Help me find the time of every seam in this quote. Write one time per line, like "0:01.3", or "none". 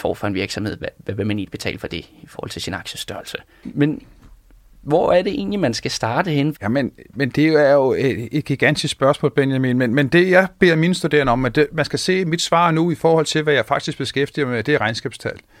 0:06.5

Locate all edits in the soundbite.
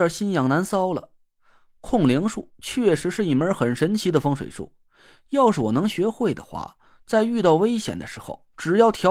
none

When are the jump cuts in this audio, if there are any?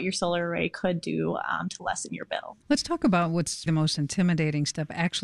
0:02.6
0:03.7

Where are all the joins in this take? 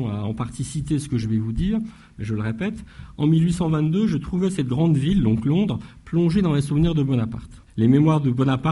0:07.7

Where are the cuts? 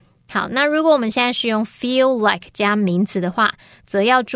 none

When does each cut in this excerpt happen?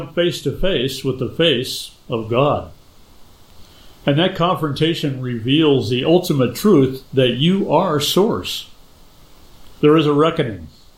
0:09.8

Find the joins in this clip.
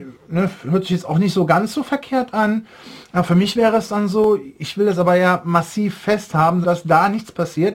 0:06.6

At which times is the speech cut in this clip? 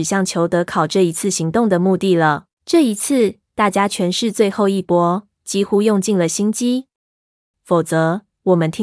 0:02.5
0:07.5

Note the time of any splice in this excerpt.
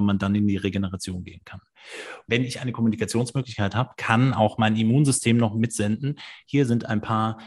0:02.3

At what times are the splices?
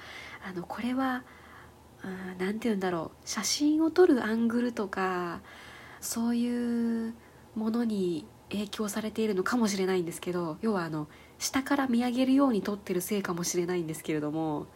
0:06.0
0:08.4

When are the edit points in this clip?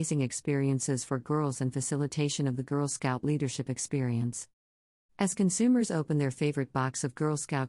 0:05.1

